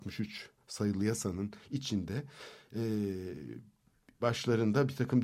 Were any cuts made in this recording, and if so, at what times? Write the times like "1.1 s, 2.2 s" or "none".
4.2 s